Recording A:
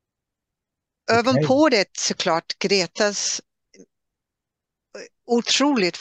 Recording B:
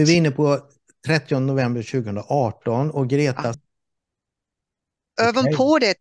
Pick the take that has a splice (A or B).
B